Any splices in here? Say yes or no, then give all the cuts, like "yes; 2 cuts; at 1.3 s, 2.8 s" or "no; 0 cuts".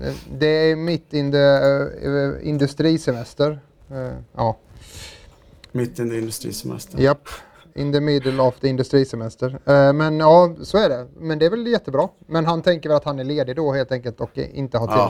no; 0 cuts